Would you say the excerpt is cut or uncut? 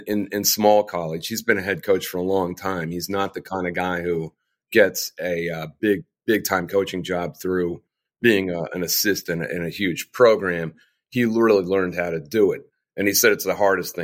uncut